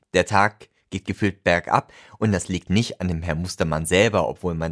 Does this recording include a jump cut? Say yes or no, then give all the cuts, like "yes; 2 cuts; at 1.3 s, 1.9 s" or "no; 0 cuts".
yes; 1 cut; at 2.7 s